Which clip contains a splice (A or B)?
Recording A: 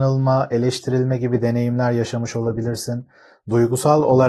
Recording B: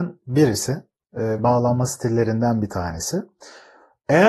B